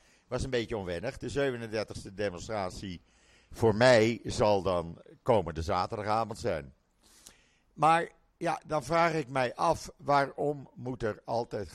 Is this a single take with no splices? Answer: yes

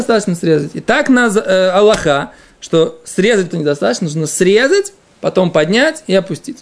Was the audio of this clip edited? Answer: yes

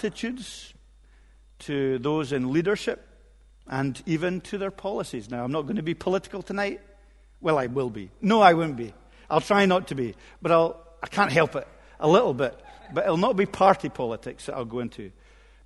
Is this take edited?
no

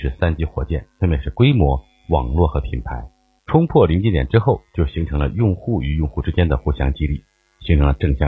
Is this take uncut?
no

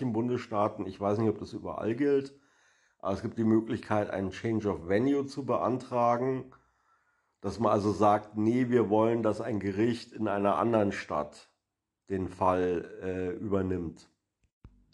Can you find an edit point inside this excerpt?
no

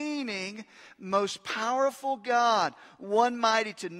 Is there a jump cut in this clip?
no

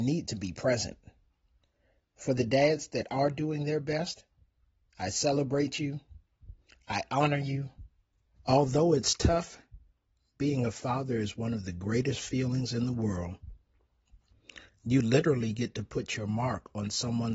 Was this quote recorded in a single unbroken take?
no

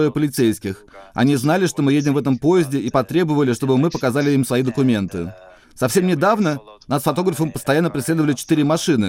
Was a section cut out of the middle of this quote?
no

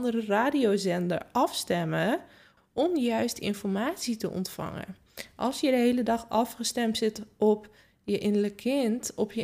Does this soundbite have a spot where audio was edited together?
yes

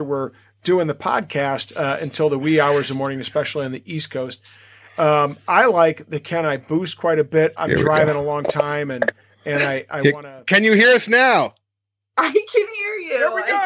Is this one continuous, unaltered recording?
no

